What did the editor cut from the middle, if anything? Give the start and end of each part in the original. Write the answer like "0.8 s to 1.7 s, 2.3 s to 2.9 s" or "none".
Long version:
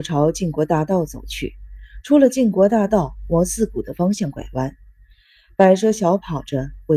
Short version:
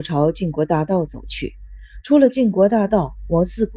none